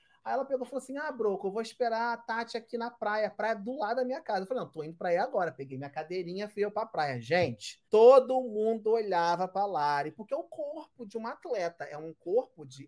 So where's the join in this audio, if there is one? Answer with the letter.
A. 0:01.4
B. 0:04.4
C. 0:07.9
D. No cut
C